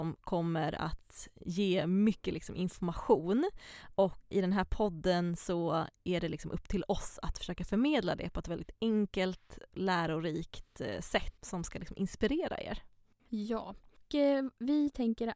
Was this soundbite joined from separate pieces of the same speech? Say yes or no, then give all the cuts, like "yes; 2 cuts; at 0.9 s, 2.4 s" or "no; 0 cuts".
yes; 2 cuts; at 11.4 s, 13.3 s